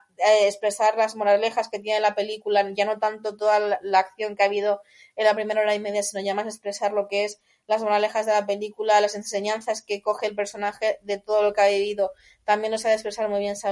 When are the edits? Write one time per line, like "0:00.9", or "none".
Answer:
none